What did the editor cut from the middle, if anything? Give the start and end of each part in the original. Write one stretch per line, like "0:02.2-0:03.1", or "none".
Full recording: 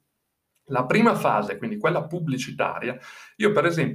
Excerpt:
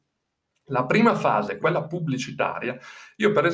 0:01.6-0:01.8